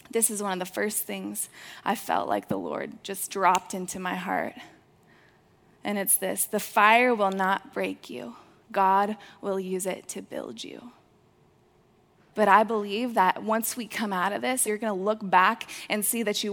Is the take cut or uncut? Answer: cut